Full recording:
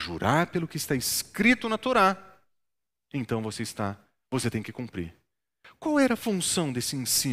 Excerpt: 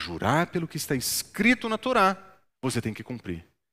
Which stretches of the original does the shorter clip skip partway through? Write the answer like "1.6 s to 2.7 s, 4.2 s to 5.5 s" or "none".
2.5 s to 4.2 s